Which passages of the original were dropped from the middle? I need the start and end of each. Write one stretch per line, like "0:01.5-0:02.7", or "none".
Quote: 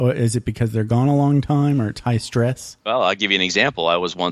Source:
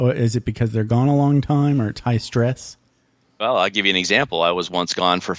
0:02.8-0:03.3